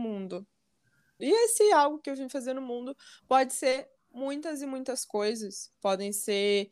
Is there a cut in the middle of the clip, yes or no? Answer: yes